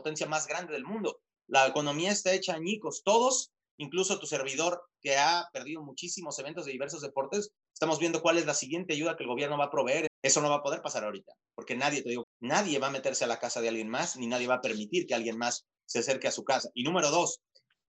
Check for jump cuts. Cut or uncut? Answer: cut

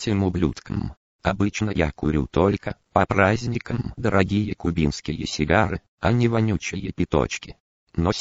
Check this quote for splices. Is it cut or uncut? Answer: uncut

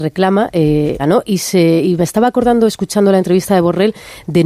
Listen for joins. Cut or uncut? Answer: cut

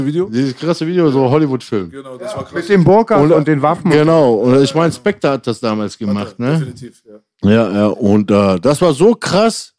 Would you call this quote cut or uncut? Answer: uncut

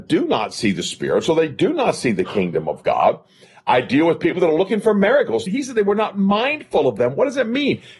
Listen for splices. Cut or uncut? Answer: cut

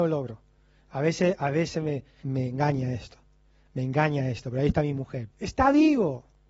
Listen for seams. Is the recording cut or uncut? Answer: cut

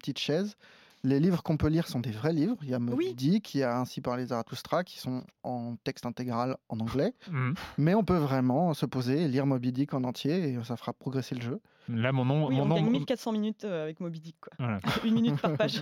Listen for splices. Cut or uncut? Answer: uncut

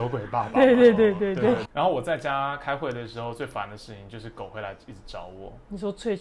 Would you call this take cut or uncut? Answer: cut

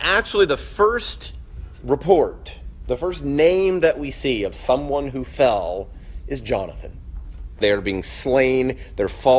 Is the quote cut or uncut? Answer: cut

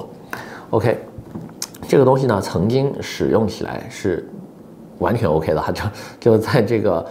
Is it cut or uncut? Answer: uncut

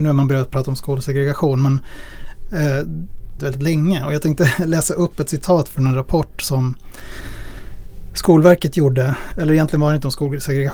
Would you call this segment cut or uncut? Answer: cut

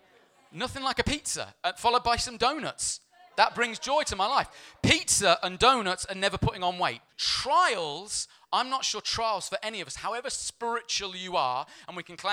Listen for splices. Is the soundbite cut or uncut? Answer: cut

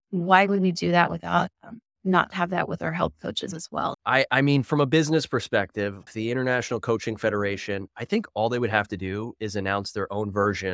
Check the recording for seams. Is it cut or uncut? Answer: cut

